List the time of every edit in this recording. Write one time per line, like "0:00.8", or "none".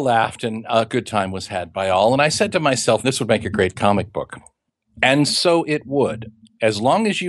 0:03.0